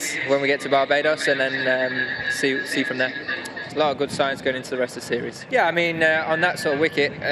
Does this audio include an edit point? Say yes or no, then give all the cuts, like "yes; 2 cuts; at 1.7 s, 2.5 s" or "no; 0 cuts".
yes; 2 cuts; at 3.7 s, 5.5 s